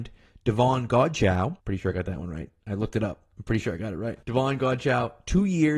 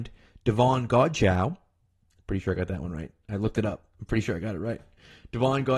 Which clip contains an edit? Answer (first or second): first